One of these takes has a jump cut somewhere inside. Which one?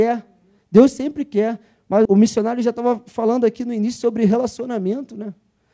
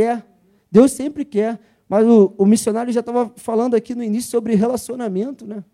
first; 1 cut; at 2.1 s

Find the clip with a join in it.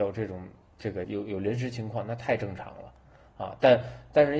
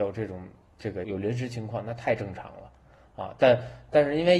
second; 1 cut; at 1.0 s

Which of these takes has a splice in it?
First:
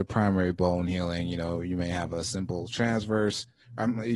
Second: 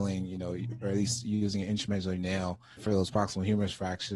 second; 1 cut; at 2.8 s

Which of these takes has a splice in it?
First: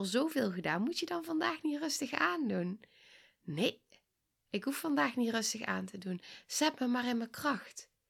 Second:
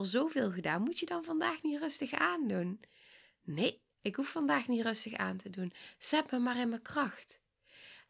second; 1 cut; at 3.9 s

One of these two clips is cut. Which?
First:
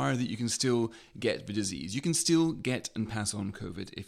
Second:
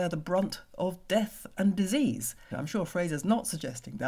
second; 1 cut; at 2.5 s

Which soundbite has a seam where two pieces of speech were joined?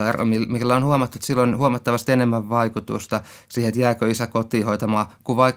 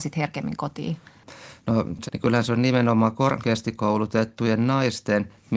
second; 1 cut; at 2.1 s

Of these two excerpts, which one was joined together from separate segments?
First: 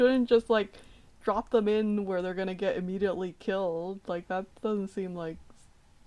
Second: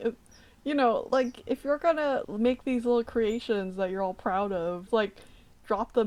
second; 2 cuts; at 2.2 s, 4.9 s

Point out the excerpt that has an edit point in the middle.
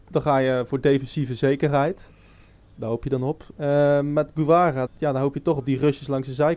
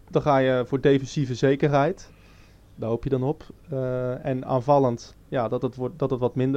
first; 2 cuts; at 3.6 s, 4.9 s

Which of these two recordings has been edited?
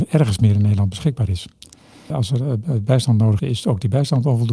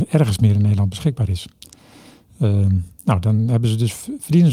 first; 2 cuts; at 2.1 s, 3.4 s

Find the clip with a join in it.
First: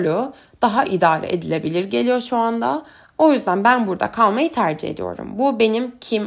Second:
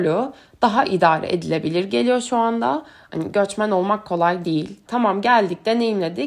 second; 2 cuts; at 3.1 s, 4.9 s

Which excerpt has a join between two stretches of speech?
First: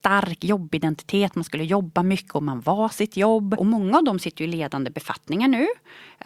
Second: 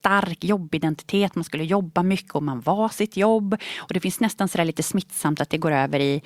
first; 1 cut; at 3.6 s

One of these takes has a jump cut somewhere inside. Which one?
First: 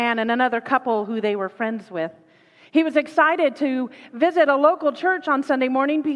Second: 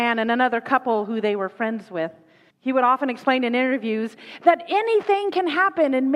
second; 1 cut; at 2.5 s

